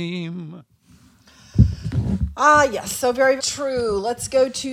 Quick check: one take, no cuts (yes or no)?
no